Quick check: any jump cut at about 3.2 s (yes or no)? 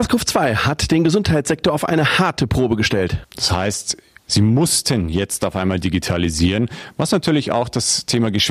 yes